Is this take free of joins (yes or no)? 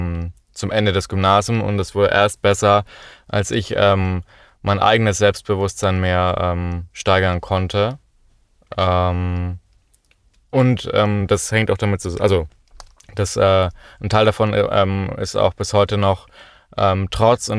yes